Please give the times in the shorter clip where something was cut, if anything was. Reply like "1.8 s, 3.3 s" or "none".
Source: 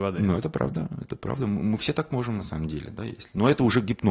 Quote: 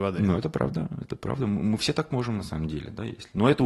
none